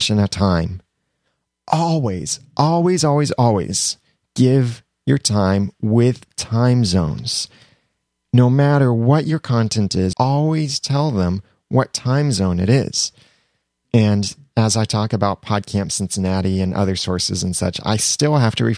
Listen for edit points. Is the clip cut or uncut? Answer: cut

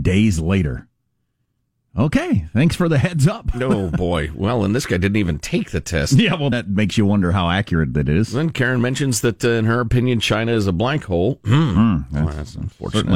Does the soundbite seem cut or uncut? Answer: cut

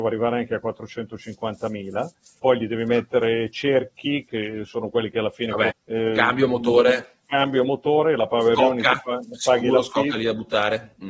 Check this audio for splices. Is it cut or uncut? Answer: cut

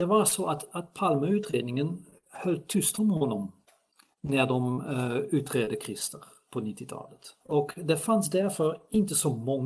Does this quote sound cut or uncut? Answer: cut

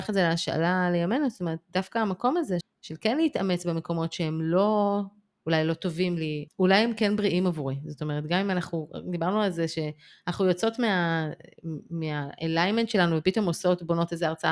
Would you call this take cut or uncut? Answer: cut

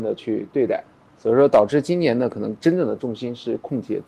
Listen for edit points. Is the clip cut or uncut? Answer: uncut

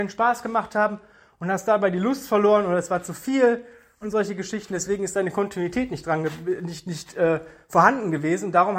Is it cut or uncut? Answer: uncut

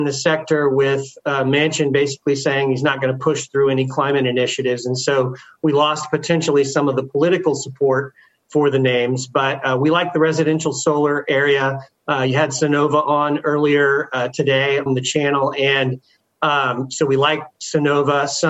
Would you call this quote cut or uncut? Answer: cut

